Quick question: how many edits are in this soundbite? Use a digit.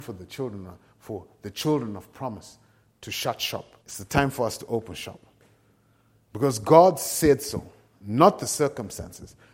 1